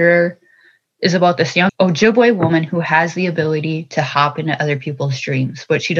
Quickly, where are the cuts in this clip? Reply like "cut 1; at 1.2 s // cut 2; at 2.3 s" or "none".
cut 1; at 1.7 s